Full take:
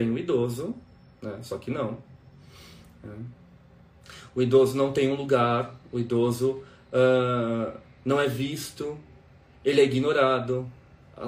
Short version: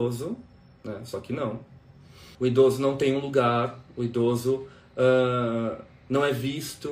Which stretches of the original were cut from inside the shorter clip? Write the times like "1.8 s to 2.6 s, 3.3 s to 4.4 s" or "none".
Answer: 2.7 s to 4.3 s